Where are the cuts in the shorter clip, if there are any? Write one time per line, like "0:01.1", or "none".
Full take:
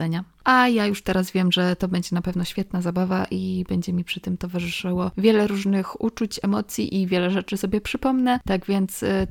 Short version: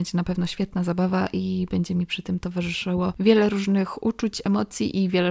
none